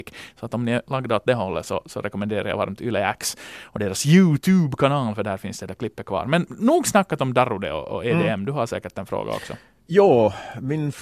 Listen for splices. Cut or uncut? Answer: uncut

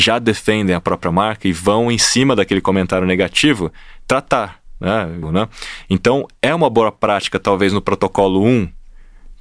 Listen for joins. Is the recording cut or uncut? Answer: cut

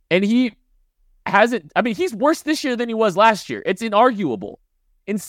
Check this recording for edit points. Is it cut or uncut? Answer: uncut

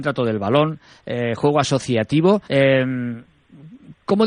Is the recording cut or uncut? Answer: cut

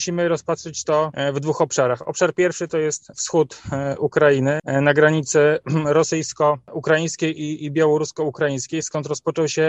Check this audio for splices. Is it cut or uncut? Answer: uncut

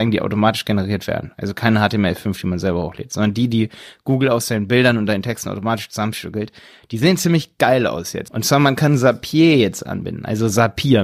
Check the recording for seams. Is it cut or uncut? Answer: cut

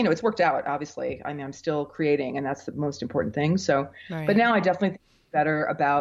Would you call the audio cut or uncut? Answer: uncut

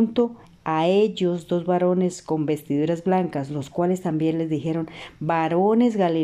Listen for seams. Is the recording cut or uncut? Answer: uncut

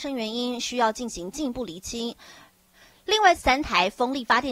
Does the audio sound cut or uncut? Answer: cut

